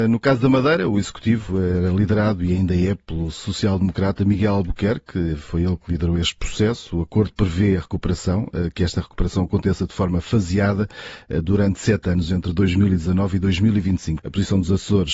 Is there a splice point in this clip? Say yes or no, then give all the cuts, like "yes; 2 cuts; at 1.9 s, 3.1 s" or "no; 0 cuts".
yes; 1 cut; at 14.2 s